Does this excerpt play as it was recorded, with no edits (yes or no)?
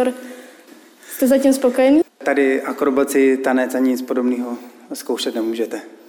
no